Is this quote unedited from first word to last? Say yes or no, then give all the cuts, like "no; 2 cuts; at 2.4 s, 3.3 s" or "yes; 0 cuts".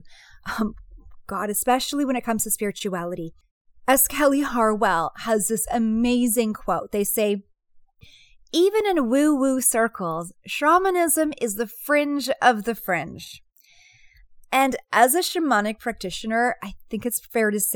yes; 0 cuts